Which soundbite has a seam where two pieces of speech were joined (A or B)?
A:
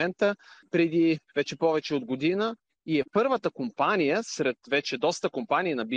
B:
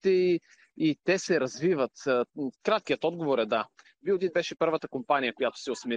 B